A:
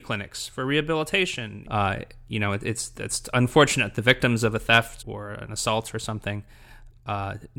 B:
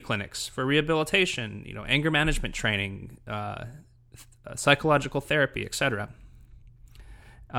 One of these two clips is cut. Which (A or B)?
A